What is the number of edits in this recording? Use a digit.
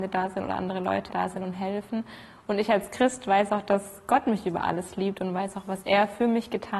1